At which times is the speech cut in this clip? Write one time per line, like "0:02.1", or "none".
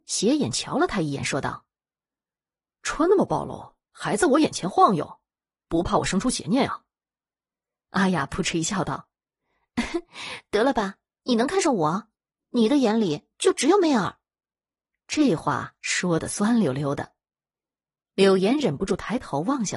none